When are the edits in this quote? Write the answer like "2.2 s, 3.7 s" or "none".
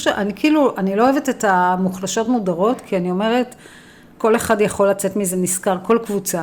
none